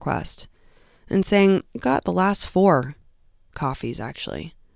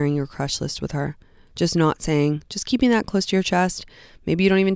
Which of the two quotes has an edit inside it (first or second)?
first